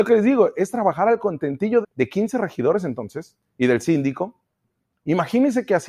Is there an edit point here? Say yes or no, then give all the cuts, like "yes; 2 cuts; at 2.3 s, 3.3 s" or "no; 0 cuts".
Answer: yes; 1 cut; at 1.8 s